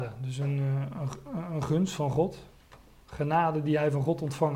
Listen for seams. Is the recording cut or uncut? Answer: uncut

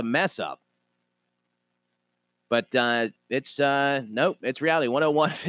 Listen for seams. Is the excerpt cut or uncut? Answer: cut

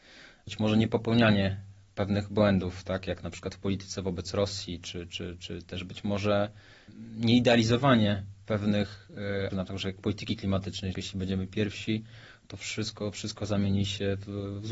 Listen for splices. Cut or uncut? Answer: cut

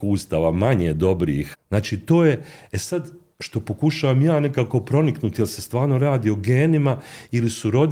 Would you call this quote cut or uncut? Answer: cut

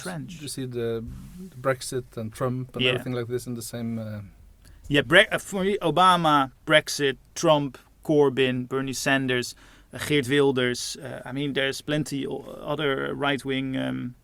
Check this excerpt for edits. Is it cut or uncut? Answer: uncut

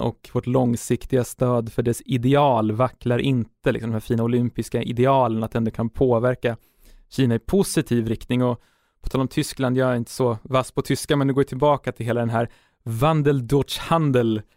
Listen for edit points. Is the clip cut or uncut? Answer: uncut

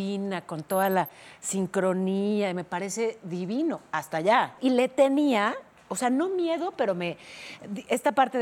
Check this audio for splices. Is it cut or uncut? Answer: uncut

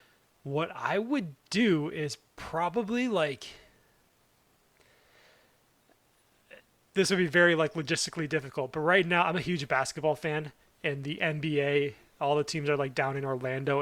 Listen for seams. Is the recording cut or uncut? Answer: uncut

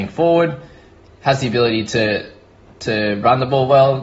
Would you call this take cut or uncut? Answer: uncut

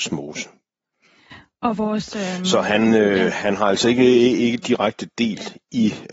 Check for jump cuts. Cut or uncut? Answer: uncut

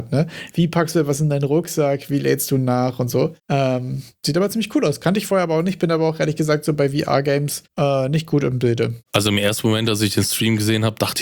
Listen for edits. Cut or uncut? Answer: uncut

